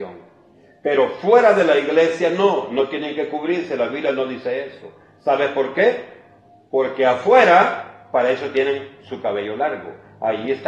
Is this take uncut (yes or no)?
yes